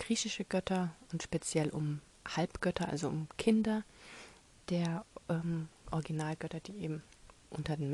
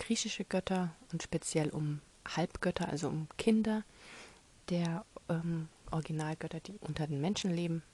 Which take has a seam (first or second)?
second